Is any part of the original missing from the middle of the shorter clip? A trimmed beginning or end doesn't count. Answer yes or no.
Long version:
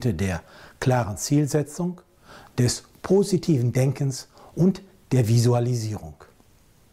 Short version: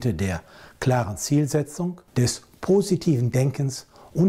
yes